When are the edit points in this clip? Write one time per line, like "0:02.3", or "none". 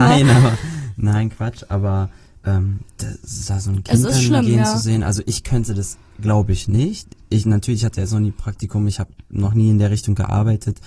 none